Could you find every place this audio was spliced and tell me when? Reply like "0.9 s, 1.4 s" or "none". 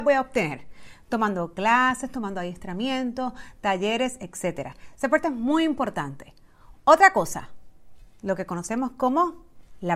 none